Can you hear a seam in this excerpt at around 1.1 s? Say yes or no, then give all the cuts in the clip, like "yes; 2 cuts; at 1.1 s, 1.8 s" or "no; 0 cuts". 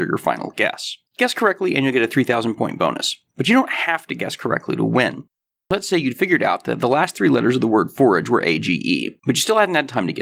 yes; 1 cut; at 1.1 s